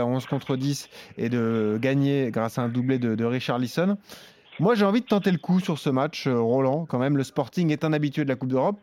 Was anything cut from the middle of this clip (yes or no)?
no